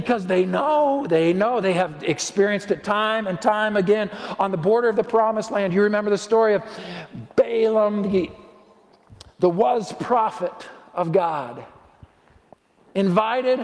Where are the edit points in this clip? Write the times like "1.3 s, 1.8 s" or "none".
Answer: none